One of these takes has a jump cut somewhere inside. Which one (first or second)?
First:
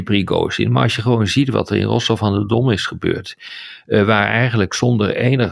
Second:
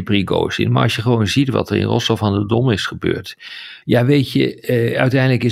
second